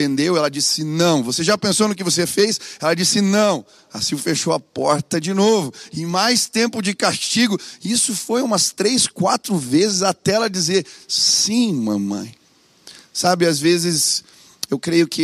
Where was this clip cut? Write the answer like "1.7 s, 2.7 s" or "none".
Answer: none